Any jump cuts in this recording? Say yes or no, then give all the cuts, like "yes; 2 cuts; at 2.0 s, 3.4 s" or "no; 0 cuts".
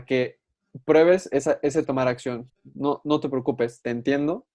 yes; 1 cut; at 2.5 s